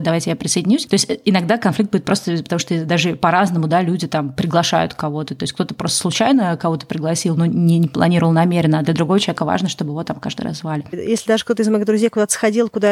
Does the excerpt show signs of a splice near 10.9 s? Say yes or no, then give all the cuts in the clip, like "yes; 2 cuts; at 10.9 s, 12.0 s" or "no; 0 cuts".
yes; 1 cut; at 10.9 s